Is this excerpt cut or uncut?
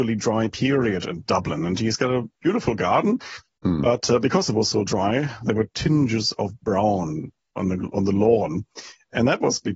uncut